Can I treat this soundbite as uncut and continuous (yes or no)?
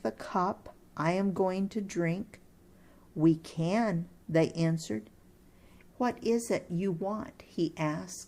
no